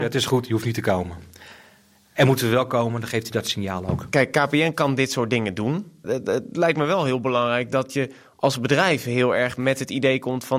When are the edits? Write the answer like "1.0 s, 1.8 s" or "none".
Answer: 6.0 s

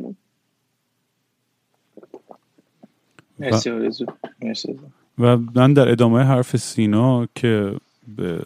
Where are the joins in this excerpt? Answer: none

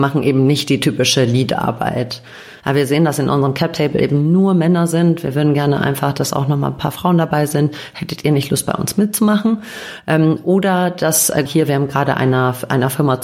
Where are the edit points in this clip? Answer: 2.6 s, 11.5 s

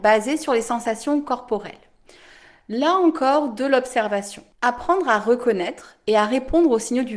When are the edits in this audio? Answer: 4.5 s

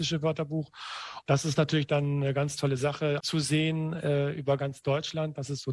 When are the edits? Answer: 1.2 s, 3.2 s

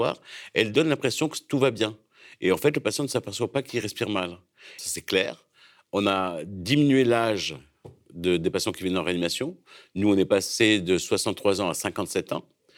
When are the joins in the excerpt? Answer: 4.8 s

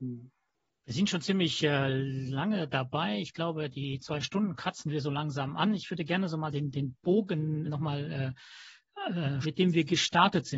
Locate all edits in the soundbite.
7.7 s, 9.4 s

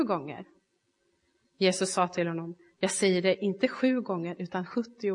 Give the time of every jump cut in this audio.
none

